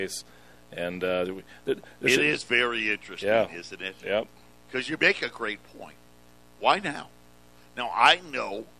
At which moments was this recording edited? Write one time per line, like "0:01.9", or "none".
none

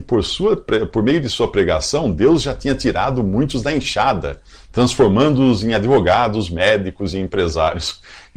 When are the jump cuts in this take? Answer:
none

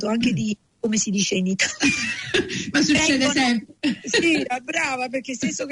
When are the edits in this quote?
none

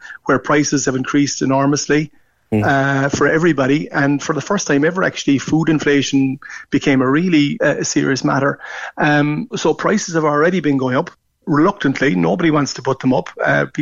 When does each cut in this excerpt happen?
0:09.5
0:11.4

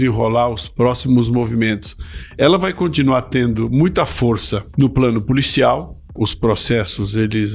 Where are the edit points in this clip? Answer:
0:06.2

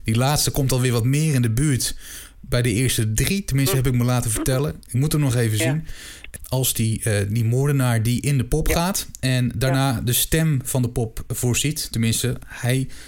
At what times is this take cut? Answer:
0:06.4

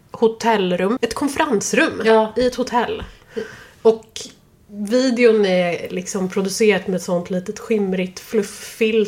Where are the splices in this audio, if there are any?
0:01.0
0:03.8

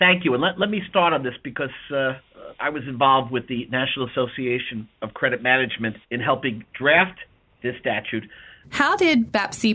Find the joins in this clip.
0:02.6
0:06.0
0:08.6

